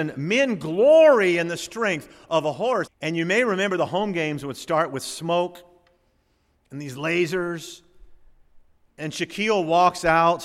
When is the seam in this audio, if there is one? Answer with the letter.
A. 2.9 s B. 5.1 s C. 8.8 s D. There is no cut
A